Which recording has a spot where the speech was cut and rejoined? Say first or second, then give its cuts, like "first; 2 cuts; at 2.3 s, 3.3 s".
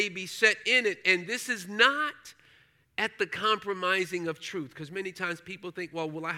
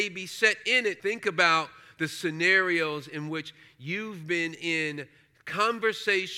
second; 1 cut; at 1.0 s